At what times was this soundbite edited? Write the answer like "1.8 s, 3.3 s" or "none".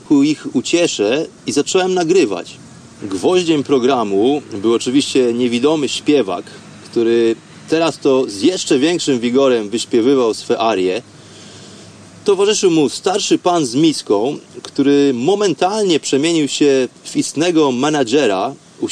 3.0 s